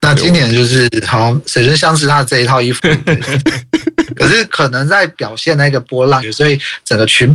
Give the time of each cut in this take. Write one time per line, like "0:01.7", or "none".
0:02.8
0:06.2